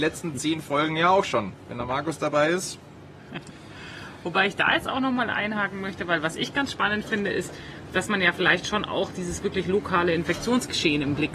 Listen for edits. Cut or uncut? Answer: uncut